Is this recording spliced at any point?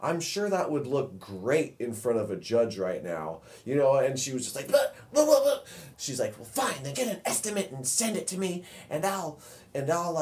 yes; 2 cuts; at 5.9 s, 6.9 s

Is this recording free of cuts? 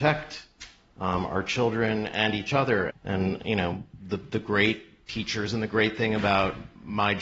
no; 1 cut; at 2.9 s

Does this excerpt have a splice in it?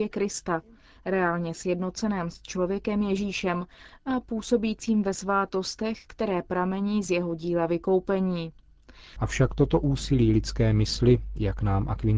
yes; 1 cut; at 9.2 s

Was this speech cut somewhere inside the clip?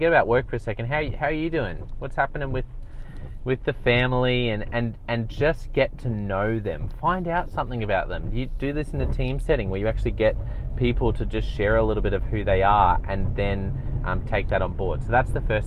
no; 0 cuts

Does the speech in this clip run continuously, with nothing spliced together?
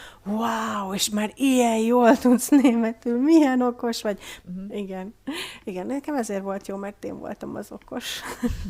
no; 1 cut; at 4.4 s

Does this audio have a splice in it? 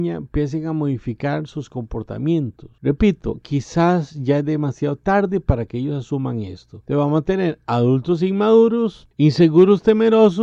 no; 0 cuts

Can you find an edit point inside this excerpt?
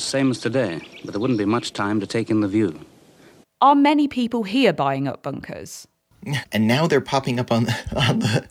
yes; 2 cuts; at 3.4 s, 6.4 s

